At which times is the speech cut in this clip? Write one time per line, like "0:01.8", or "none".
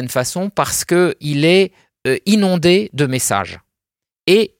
none